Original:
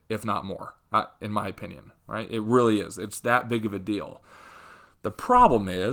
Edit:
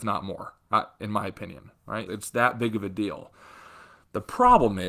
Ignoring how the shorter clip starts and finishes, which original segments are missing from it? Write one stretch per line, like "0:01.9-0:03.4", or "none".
0:02.3-0:03.0